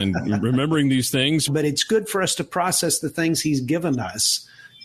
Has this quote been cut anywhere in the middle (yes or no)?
yes